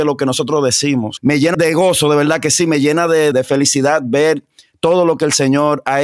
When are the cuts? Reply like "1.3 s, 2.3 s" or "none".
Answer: 1.5 s, 3.3 s

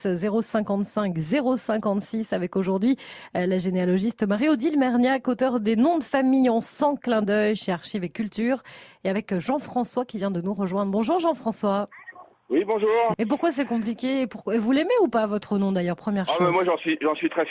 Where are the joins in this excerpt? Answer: 13.1 s

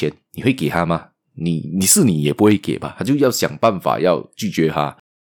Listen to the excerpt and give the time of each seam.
none

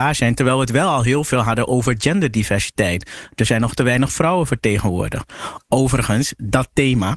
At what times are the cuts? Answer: none

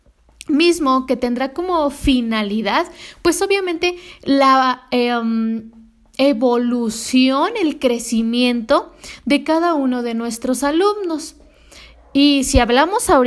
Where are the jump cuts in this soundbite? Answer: none

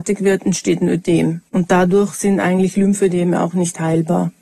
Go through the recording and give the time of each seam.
1.5 s

